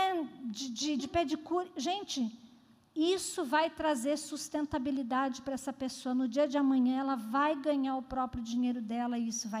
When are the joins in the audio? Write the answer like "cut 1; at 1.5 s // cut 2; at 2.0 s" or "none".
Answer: cut 1; at 1.0 s